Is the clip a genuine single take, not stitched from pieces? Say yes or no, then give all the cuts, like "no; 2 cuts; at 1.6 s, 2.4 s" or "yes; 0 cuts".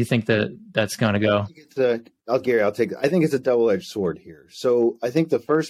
yes; 0 cuts